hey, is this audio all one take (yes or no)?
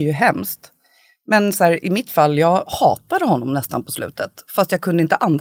yes